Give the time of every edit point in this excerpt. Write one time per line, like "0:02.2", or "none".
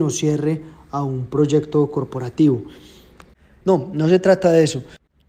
0:03.6